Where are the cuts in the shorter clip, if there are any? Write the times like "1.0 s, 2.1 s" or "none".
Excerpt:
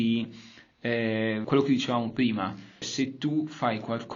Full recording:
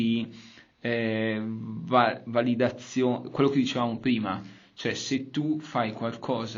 1.4 s, 2.8 s